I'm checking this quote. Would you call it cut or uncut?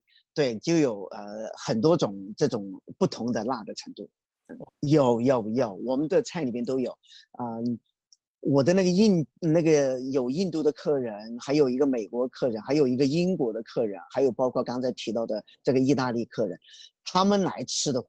cut